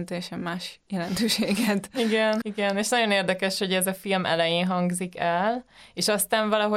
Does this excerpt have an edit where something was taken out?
yes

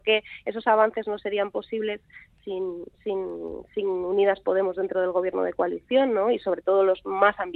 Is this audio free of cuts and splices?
yes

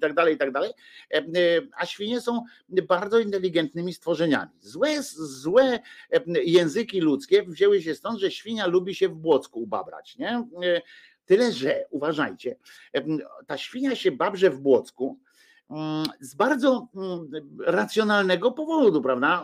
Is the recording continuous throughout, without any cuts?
yes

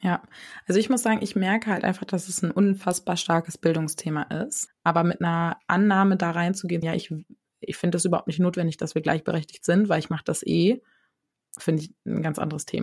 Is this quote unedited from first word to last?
no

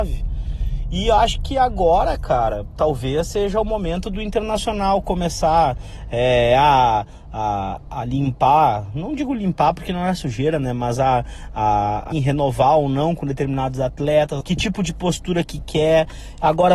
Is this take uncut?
no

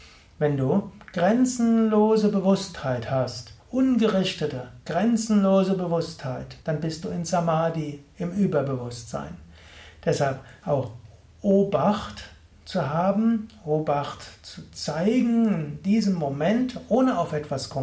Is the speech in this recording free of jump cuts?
no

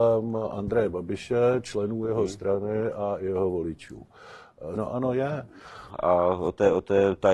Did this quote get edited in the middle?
yes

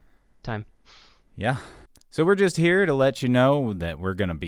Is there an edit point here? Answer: no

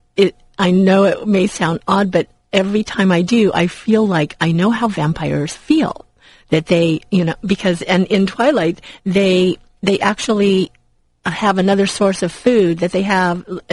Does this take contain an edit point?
no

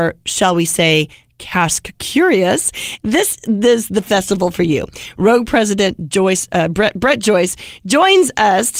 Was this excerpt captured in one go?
yes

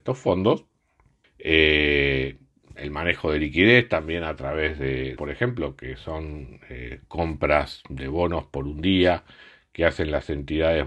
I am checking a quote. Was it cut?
yes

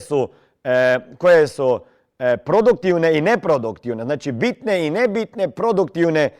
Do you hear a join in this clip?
no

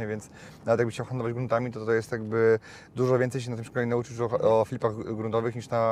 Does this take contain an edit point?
no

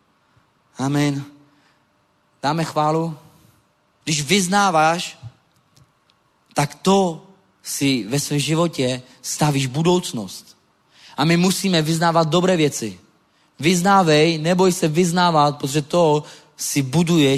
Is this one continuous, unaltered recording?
no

